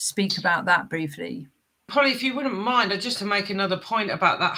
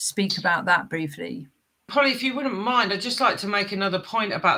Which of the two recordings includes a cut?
first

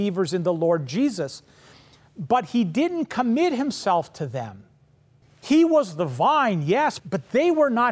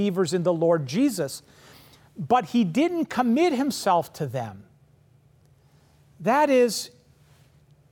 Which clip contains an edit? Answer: first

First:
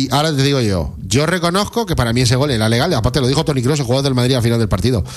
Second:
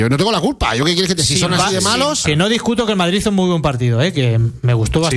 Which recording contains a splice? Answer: second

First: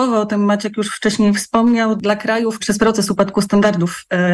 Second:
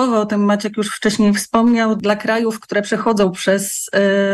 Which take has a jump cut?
first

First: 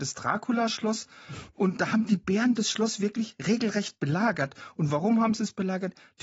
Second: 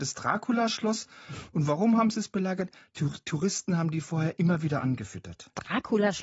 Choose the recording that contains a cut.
second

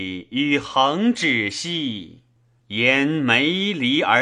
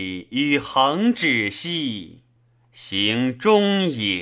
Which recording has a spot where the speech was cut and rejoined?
first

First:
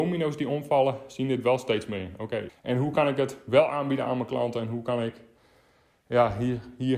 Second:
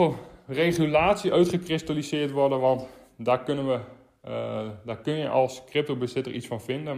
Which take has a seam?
first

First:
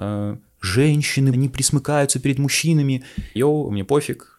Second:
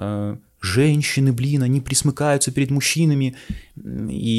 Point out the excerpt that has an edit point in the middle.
first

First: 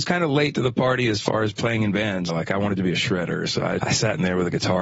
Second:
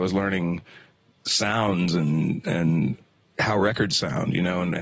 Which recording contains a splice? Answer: first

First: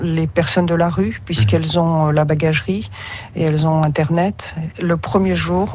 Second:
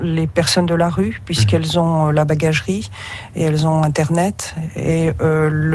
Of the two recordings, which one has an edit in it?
first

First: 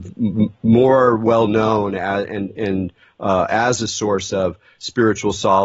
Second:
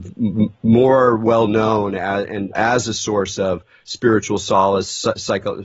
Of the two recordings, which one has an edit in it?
second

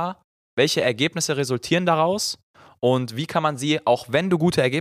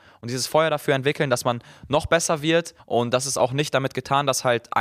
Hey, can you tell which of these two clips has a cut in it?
second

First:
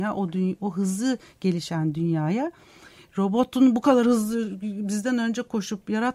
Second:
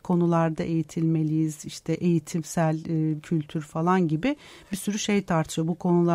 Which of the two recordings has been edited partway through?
second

